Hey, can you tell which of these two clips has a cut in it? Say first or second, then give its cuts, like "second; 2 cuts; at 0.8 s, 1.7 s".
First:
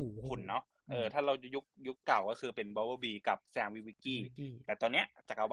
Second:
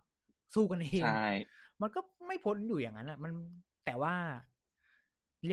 first; 1 cut; at 3.4 s